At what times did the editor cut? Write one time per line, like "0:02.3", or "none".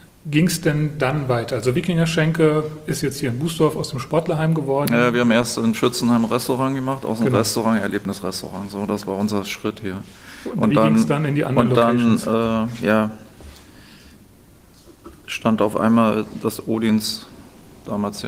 none